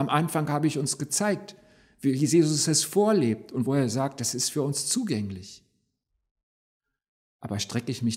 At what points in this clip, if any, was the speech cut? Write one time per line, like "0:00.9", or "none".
none